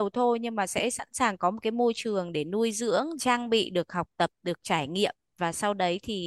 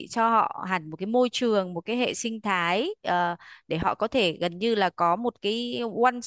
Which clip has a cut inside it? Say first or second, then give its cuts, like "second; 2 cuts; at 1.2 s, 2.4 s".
first; 1 cut; at 3.2 s